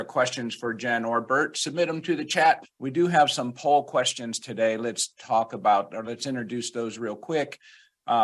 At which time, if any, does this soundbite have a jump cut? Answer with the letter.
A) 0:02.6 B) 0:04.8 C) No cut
A